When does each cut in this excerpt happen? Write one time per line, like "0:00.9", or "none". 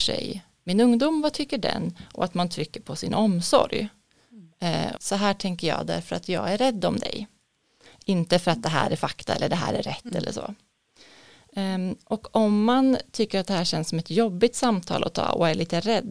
0:05.0